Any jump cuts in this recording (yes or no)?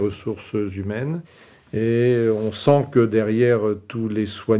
no